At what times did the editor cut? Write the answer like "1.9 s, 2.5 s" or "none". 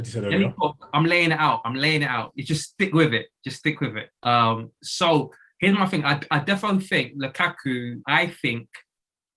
4.2 s, 8.0 s